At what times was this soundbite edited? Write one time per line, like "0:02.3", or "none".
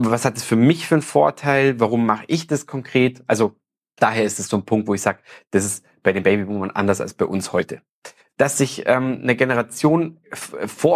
0:08.3

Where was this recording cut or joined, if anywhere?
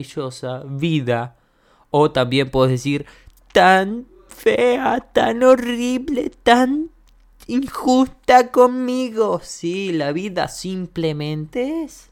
none

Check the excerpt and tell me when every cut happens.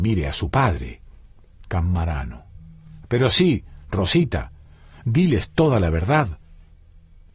none

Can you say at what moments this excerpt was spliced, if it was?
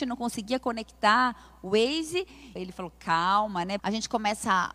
0:02.6
0:03.8

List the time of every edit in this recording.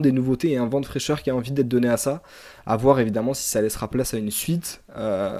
none

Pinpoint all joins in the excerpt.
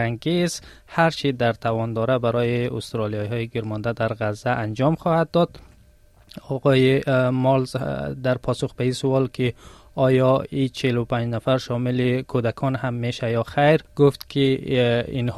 0:13.9

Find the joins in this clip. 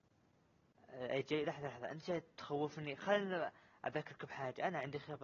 none

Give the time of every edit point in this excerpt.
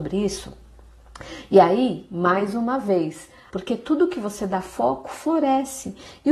0:03.5

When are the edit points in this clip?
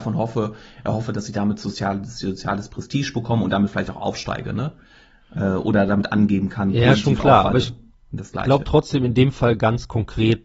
none

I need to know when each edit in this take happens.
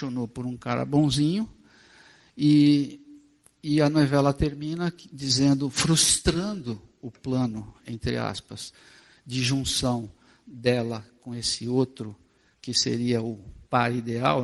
none

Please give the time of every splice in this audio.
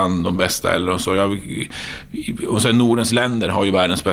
none

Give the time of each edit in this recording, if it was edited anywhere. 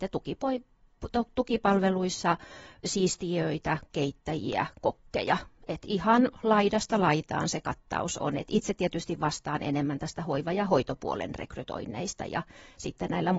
none

